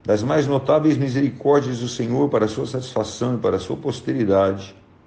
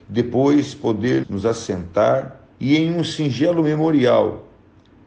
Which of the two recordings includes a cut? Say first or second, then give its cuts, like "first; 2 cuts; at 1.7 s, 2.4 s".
second; 2 cuts; at 1.2 s, 2.5 s